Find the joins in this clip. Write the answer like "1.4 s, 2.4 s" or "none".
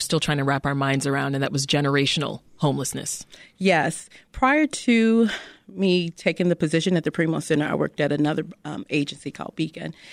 none